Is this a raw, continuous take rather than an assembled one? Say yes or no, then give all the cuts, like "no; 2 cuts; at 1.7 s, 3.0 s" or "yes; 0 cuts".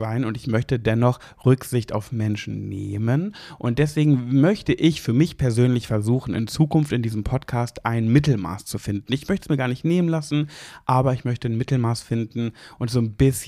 yes; 0 cuts